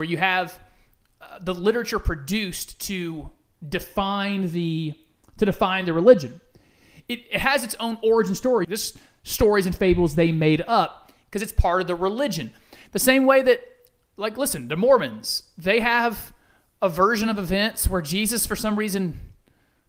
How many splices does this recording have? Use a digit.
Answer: 1